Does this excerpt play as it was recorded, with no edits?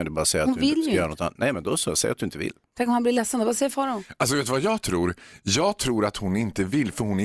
yes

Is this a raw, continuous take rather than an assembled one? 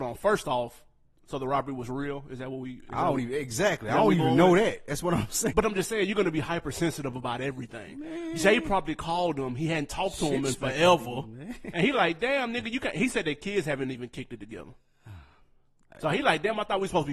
no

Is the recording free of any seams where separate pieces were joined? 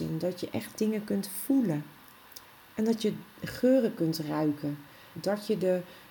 no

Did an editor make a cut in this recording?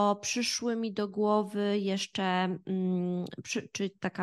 no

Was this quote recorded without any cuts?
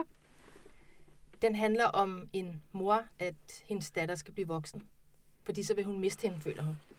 no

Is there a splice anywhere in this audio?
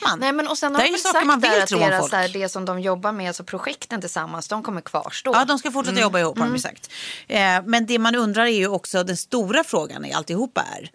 no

